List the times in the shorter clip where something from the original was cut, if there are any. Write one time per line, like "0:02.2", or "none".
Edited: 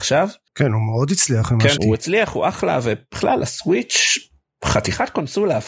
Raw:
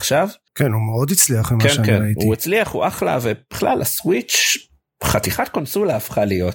0:01.8